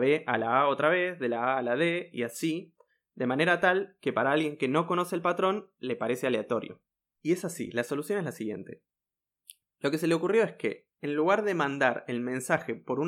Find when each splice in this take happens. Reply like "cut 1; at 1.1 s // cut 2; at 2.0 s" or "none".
cut 1; at 7.2 s